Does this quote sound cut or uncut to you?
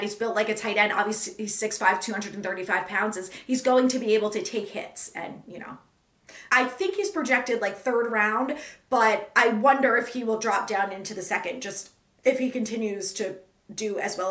cut